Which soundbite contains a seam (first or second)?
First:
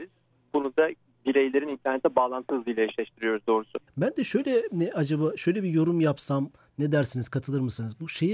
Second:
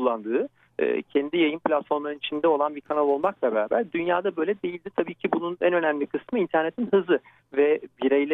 first